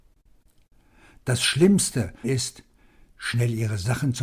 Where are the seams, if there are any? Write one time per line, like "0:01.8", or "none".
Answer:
0:02.2